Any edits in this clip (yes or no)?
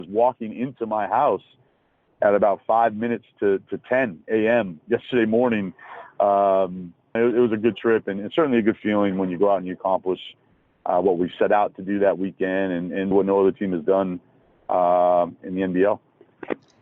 yes